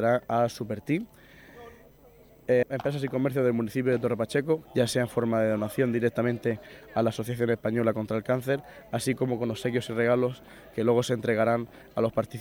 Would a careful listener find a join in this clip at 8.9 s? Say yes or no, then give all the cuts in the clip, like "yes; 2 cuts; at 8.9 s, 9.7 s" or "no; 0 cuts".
no; 2 cuts; at 2.6 s, 4.7 s